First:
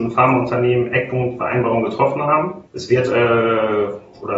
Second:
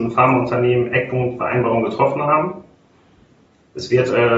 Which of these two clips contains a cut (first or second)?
first